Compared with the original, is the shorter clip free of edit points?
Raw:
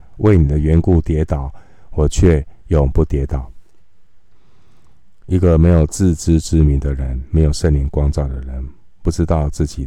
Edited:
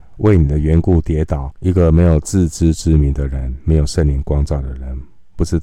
no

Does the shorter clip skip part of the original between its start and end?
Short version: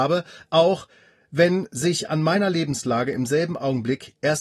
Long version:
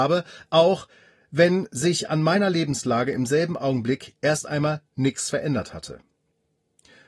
no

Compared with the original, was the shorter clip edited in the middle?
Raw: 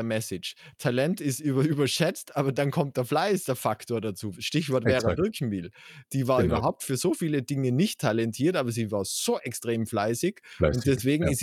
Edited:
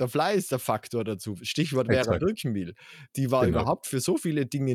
no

